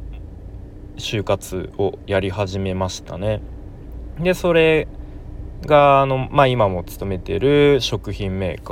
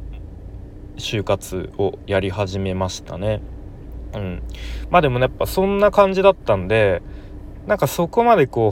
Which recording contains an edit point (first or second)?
first